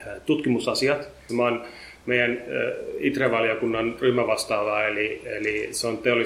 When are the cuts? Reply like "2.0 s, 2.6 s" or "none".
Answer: 1.3 s